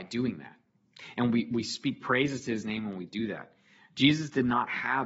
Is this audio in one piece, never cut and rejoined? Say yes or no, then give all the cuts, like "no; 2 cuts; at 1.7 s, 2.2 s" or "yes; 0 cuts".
yes; 0 cuts